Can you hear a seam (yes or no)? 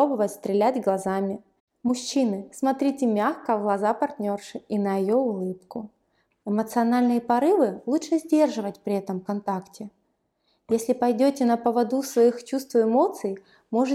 yes